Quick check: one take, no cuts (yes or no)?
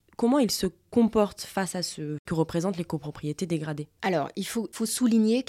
no